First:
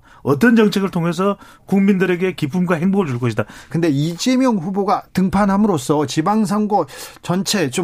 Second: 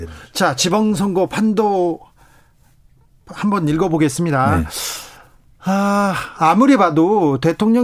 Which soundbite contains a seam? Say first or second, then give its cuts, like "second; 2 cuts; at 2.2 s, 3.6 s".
first; 1 cut; at 3.7 s